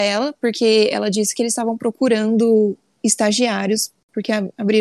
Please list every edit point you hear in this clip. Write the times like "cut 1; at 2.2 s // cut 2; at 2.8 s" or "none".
none